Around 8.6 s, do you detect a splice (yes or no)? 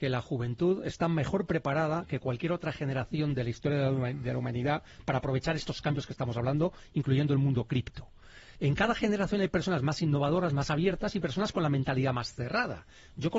yes